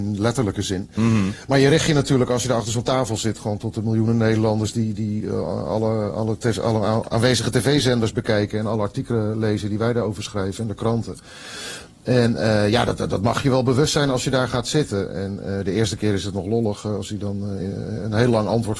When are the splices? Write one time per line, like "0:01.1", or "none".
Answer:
none